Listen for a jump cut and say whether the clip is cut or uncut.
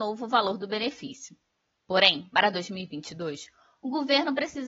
uncut